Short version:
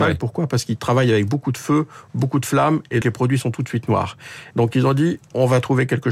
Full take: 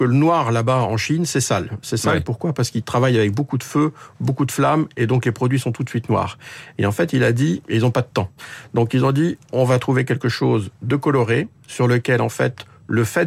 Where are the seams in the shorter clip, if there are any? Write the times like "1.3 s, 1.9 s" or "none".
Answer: 3.0 s, 4.5 s